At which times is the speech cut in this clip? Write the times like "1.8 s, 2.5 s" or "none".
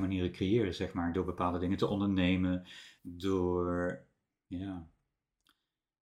3.0 s, 4.3 s